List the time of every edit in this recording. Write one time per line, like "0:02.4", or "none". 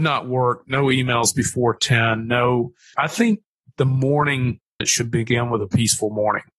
0:02.9
0:04.8

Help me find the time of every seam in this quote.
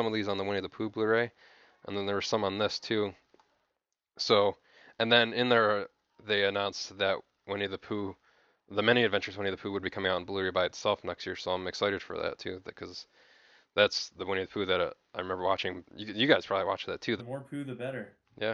0:15.9
0:17.2

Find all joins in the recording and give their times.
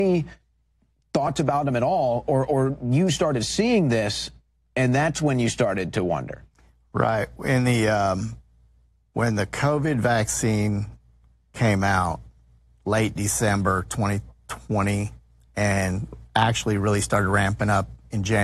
none

